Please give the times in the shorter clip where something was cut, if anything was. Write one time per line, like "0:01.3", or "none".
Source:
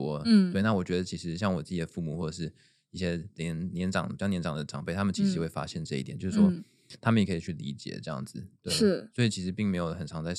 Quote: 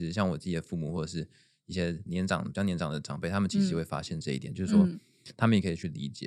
0:02.1